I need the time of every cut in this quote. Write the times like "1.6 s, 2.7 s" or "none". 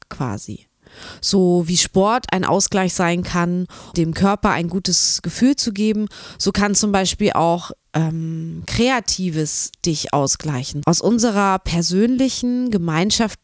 3.9 s, 10.8 s